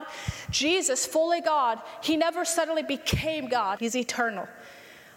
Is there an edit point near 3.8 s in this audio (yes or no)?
yes